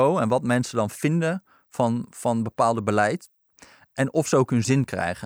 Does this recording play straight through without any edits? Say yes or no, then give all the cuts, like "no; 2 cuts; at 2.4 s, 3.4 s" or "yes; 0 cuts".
yes; 0 cuts